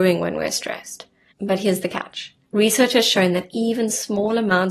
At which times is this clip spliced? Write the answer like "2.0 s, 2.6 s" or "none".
1.3 s, 2.4 s